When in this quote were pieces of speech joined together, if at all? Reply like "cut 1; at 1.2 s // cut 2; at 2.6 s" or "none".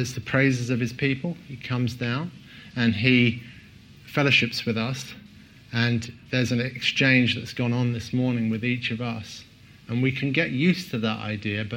none